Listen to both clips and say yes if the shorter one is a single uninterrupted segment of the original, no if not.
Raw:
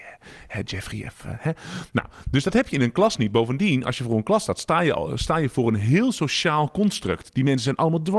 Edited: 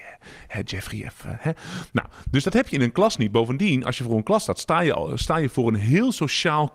yes